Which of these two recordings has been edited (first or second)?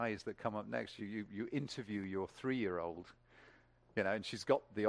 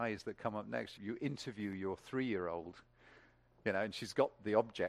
second